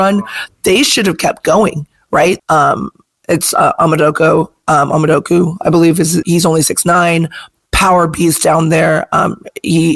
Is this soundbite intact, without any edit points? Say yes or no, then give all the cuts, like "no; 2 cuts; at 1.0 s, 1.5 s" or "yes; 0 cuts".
no; 2 cuts; at 2.4 s, 6.2 s